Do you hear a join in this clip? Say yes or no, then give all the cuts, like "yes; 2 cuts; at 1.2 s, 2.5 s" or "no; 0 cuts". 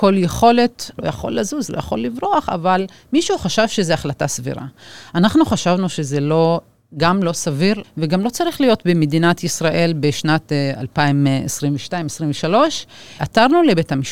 yes; 2 cuts; at 1.0 s, 7.8 s